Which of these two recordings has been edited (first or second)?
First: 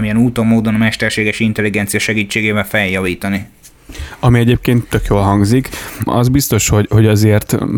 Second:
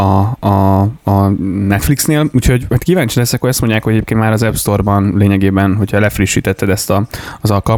first